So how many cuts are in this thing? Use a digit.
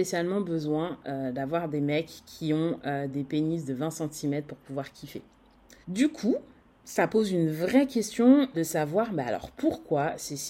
2